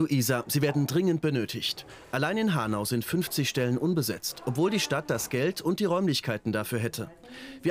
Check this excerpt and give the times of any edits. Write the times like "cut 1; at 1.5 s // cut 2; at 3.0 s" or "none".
none